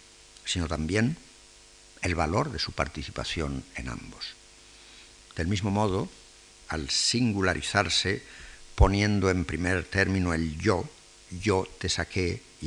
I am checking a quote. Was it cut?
no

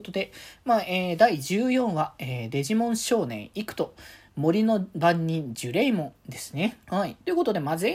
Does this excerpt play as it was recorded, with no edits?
no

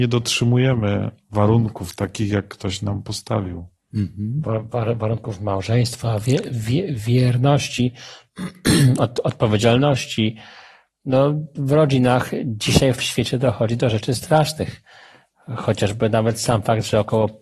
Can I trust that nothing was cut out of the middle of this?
no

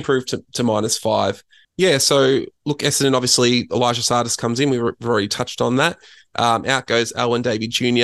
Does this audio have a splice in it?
yes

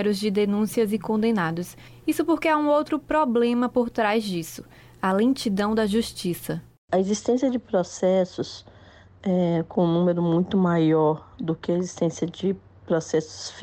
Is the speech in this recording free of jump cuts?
yes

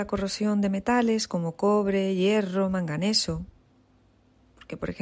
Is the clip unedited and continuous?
yes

